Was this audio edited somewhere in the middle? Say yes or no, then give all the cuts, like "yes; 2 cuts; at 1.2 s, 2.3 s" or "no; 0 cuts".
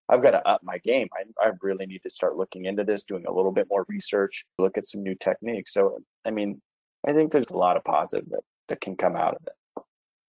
yes; 2 cuts; at 4.6 s, 7.4 s